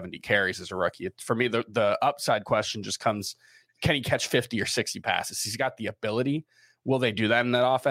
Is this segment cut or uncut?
uncut